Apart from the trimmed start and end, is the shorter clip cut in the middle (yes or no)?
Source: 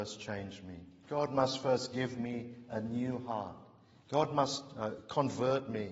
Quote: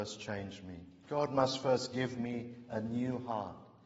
no